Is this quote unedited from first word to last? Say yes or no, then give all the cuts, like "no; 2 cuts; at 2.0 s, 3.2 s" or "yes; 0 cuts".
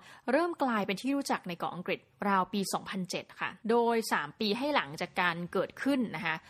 no; 1 cut; at 3.6 s